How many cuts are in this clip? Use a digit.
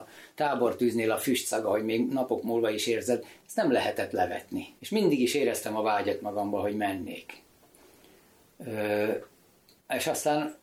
1